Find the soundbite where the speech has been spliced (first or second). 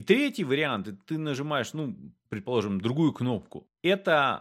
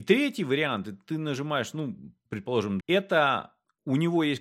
second